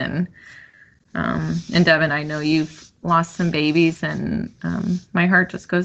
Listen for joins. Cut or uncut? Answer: uncut